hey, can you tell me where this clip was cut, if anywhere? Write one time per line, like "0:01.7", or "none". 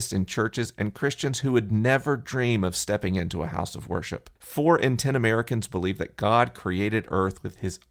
0:04.4